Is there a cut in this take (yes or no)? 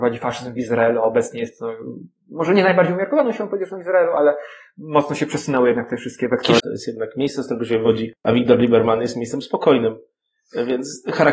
yes